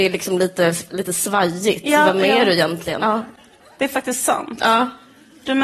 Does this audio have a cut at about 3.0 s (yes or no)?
yes